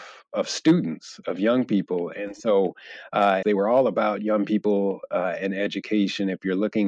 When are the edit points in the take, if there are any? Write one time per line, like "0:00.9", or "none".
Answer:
0:03.4